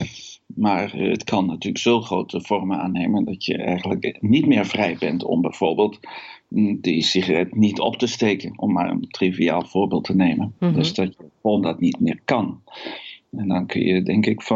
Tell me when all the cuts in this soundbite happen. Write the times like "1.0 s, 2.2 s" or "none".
none